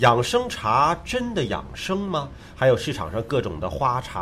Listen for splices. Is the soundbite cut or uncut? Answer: uncut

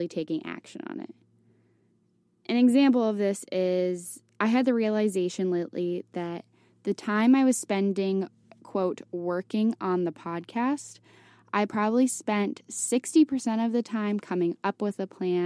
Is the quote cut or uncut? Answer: uncut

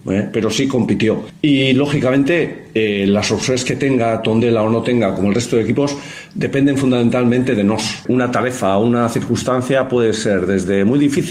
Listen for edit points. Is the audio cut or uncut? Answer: uncut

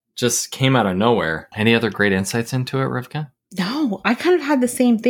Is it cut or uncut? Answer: cut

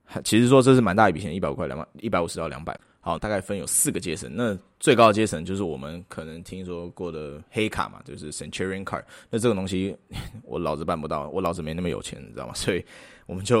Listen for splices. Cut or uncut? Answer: cut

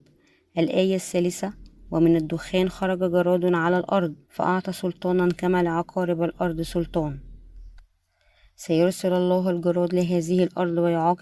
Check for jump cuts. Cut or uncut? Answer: cut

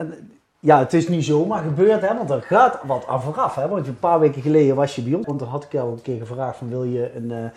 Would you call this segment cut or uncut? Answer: cut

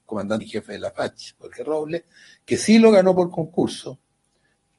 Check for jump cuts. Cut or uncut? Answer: uncut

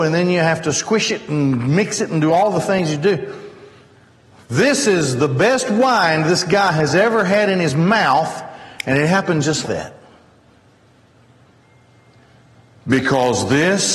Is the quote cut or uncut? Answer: cut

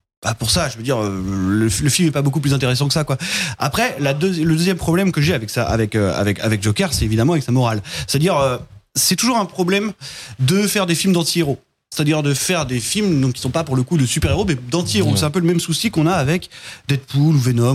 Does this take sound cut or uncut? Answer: uncut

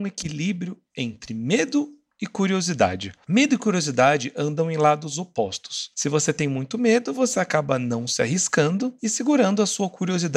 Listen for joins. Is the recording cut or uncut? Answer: uncut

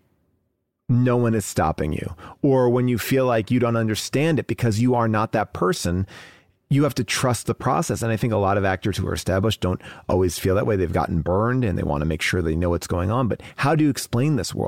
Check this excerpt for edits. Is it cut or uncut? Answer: uncut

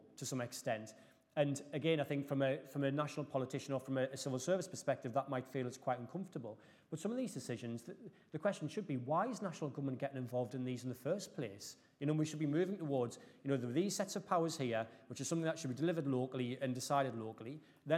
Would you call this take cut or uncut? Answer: uncut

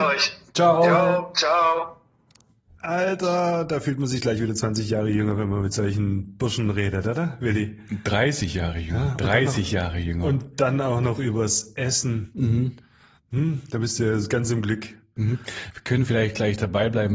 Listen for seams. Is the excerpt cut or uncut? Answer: uncut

